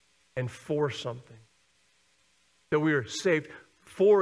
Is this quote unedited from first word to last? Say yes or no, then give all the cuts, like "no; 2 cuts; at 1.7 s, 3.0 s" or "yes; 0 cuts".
yes; 0 cuts